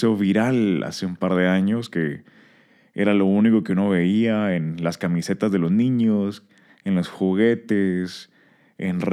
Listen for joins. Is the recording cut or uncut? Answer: uncut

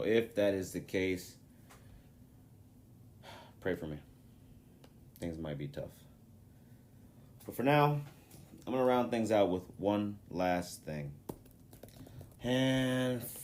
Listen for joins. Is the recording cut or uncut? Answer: cut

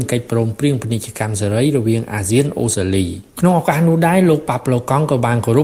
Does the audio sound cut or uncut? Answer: cut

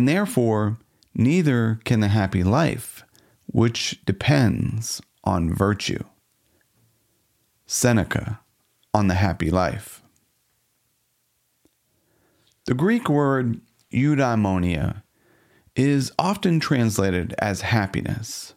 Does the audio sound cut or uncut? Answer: uncut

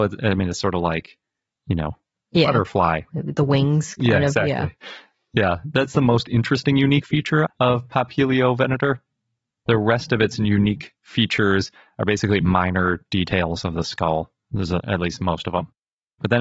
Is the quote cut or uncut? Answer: cut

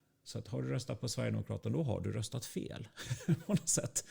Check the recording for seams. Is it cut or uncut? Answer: uncut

